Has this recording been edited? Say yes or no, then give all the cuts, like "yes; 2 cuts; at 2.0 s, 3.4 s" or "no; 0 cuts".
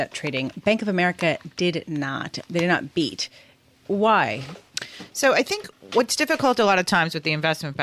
yes; 1 cut; at 2.4 s